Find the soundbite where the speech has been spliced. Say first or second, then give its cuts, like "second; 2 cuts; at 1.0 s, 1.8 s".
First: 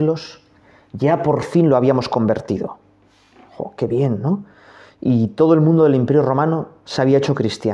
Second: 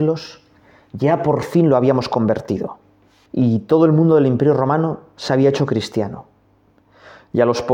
second; 1 cut; at 3.3 s